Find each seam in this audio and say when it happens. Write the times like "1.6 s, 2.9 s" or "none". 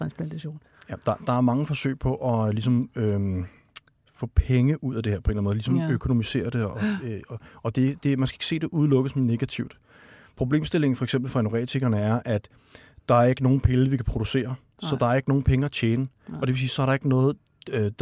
none